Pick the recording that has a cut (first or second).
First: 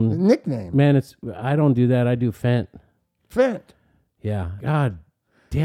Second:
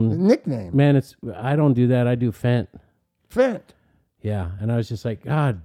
first